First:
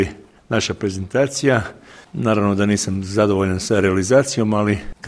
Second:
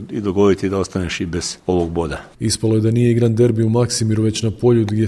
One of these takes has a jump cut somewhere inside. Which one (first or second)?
second